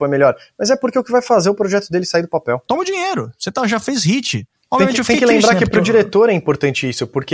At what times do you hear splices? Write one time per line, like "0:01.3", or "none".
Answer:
0:02.7